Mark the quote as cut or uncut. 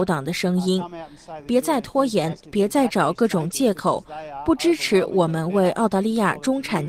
uncut